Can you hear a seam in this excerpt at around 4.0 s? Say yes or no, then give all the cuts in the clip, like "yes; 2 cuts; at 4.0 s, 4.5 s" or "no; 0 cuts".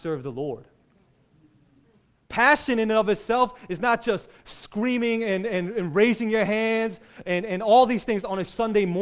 no; 0 cuts